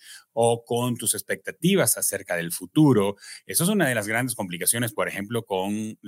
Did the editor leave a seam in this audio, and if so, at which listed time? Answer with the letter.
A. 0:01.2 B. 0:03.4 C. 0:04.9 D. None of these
D